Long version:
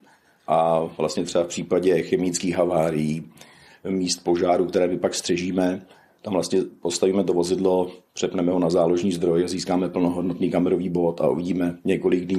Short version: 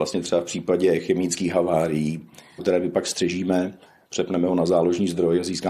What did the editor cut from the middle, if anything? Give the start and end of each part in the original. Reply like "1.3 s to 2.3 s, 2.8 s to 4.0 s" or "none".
3.6 s to 4.7 s, 6.1 s to 8.1 s